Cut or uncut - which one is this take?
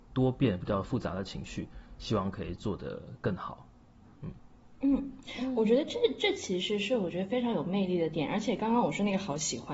uncut